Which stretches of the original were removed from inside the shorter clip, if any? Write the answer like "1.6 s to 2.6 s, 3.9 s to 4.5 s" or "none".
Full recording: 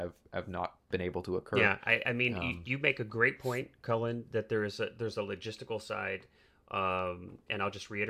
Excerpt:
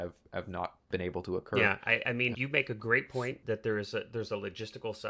2.3 s to 2.6 s, 3.7 s to 4.3 s